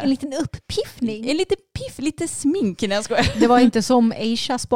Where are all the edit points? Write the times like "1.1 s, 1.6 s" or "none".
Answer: none